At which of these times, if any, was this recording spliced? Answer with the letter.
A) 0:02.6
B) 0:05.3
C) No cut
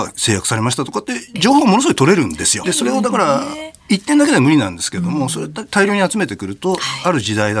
A